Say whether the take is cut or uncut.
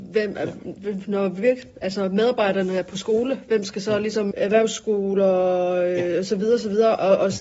cut